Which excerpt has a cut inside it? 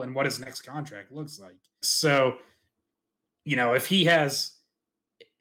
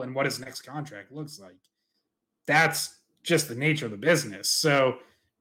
first; 1 cut; at 1.8 s

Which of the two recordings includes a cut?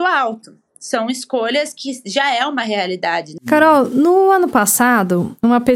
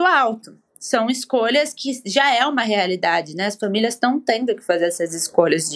first; 1 cut; at 3.4 s

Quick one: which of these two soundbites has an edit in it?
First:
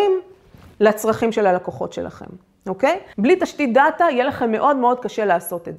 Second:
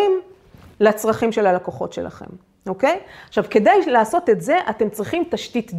first; 1 cut; at 3.1 s

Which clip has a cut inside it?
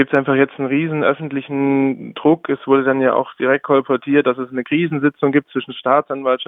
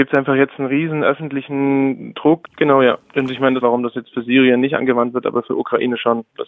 second; 2 cuts; at 2.4 s, 3.6 s

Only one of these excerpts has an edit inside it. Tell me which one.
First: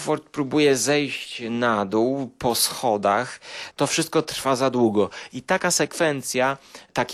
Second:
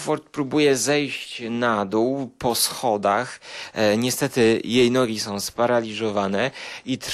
first; 1 cut; at 3.7 s

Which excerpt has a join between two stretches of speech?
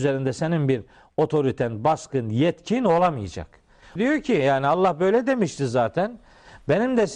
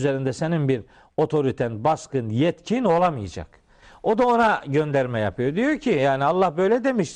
first; 1 cut; at 4.0 s

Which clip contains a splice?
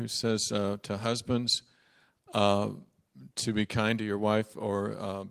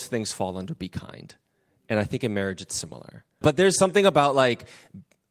second; 1 cut; at 3.4 s

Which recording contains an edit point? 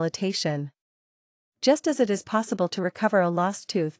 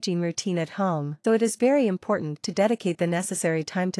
second; 1 cut; at 1.2 s

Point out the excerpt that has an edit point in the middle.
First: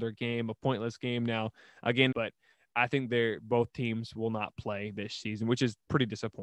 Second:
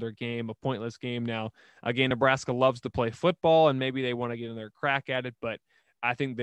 first; 1 cut; at 2.1 s

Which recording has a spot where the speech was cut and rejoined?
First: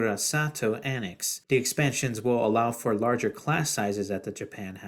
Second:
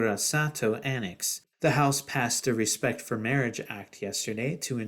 second; 1 cut; at 1.5 s

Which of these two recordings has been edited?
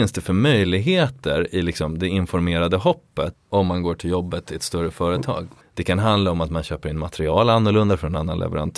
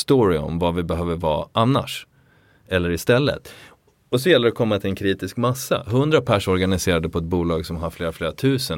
first; 2 cuts; at 3.3 s, 5.6 s

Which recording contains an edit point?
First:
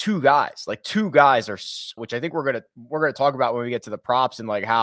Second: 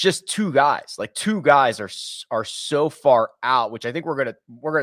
first; 1 cut; at 2.0 s

